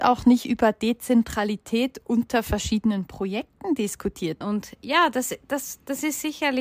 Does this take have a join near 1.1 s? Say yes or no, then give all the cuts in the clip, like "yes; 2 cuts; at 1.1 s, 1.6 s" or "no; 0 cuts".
no; 1 cut; at 4.4 s